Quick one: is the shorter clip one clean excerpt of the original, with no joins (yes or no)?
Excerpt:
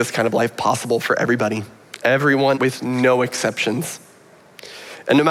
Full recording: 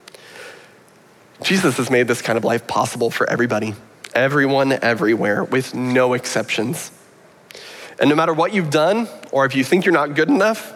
no